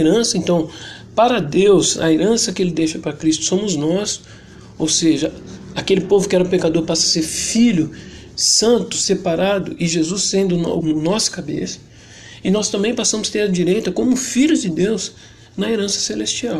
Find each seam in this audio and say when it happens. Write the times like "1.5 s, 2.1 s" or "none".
10.8 s